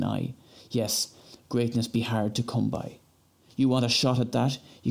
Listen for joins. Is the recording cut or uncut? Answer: uncut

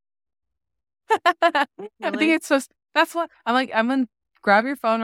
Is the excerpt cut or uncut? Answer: uncut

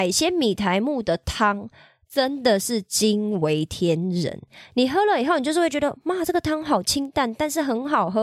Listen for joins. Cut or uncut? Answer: uncut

